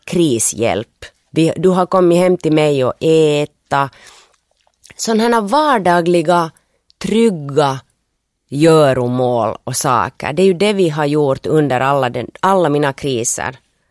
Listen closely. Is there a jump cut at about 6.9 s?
no; 1 cut; at 1.3 s

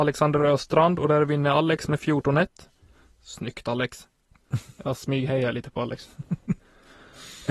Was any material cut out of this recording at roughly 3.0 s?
no; 0 cuts

